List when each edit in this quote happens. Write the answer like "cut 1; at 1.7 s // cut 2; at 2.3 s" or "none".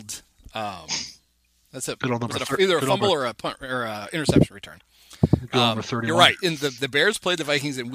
none